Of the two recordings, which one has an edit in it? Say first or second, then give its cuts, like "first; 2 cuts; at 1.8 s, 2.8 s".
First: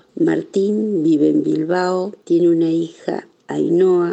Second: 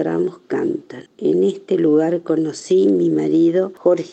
second; 1 cut; at 1.1 s